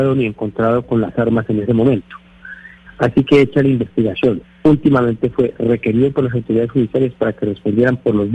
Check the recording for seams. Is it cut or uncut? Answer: cut